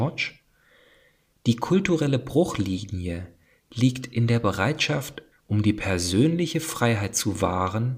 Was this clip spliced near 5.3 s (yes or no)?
yes